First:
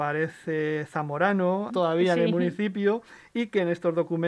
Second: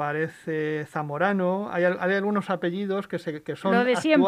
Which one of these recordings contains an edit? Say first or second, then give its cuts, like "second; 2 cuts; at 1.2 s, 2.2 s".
first; 1 cut; at 1.7 s